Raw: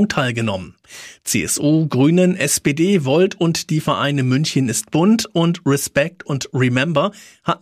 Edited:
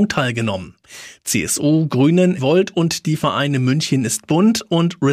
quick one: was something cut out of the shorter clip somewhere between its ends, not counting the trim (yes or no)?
yes